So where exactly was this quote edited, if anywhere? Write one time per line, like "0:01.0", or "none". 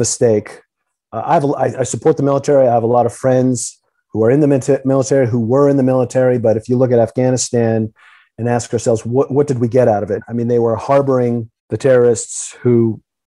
0:10.2
0:11.6